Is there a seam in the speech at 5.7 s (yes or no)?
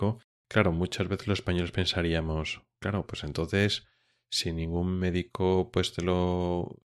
no